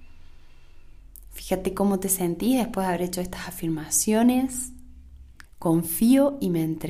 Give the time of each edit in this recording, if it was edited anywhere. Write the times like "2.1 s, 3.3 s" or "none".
5.5 s